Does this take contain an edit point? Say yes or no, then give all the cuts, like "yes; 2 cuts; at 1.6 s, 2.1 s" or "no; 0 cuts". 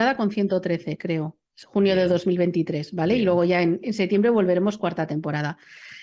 no; 0 cuts